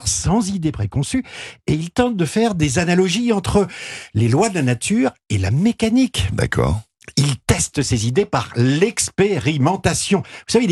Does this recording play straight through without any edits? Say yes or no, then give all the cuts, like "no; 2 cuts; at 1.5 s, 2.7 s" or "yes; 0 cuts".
yes; 0 cuts